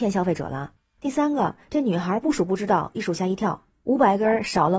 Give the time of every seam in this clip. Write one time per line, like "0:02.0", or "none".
none